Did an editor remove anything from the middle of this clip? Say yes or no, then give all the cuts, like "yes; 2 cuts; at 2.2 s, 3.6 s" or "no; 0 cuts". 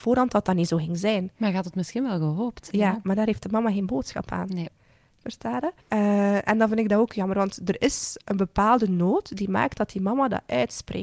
yes; 1 cut; at 5.8 s